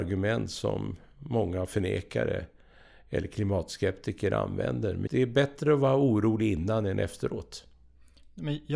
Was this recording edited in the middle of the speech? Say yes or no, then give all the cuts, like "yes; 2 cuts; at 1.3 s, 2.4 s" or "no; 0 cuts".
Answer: yes; 1 cut; at 5.1 s